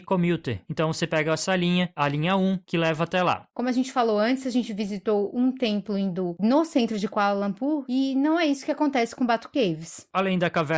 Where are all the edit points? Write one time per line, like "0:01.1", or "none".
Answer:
0:03.5
0:07.8